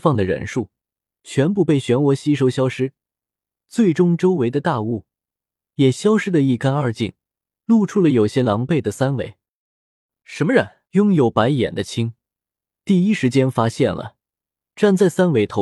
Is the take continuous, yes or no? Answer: no